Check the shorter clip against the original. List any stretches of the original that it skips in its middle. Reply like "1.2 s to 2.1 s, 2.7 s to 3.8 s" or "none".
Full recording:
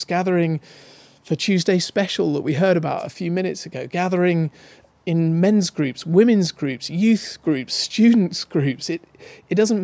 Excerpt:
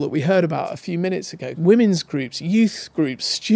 3.9 s to 6.0 s